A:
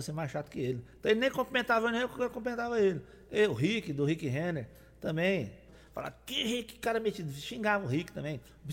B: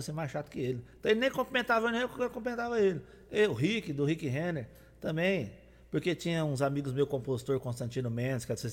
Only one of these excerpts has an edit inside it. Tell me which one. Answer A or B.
A